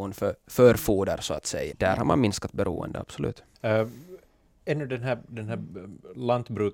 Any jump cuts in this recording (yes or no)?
yes